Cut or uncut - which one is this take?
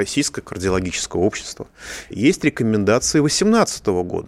cut